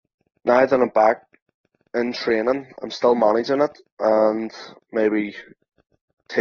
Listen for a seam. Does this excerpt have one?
no; 0 cuts

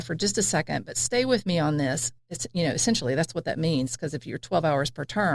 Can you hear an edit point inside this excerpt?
yes; 1 cut; at 2.2 s

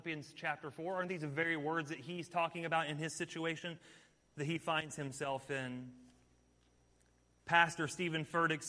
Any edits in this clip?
no; 0 cuts

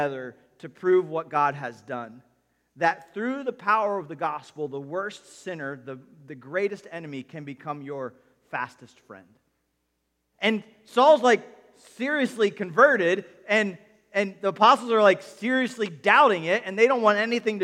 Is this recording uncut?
no; 1 cut; at 10.3 s

